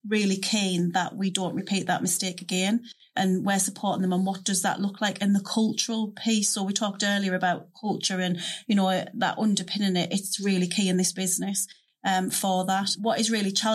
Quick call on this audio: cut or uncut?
uncut